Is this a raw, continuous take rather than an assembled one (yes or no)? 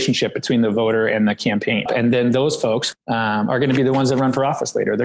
no